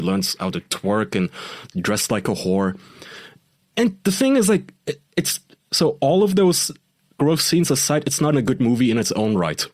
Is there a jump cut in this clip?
yes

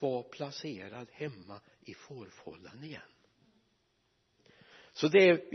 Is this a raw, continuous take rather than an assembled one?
yes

